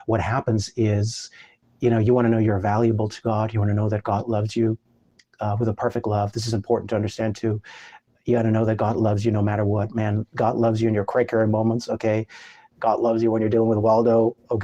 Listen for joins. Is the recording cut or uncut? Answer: cut